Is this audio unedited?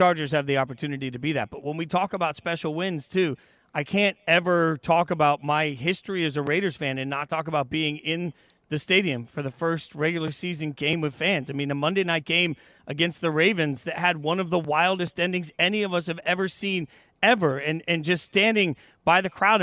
yes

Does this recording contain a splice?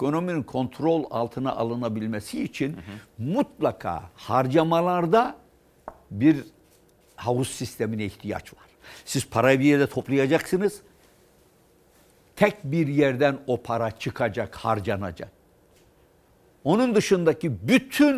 no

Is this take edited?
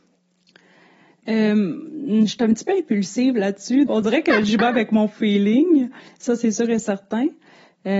yes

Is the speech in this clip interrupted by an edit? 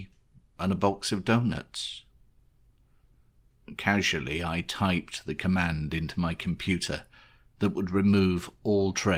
no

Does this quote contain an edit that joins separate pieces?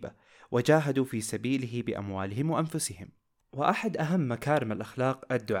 no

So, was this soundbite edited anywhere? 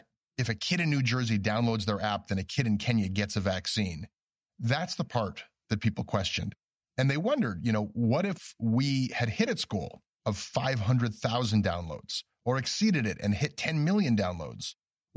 no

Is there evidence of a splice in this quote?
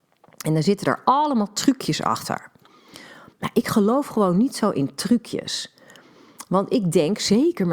no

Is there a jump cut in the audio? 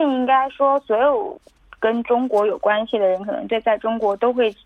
no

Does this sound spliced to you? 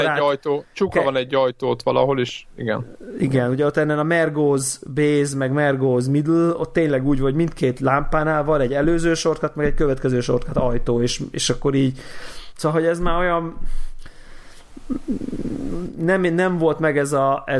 no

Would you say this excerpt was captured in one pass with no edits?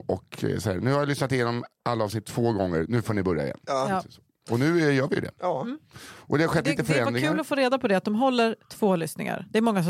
yes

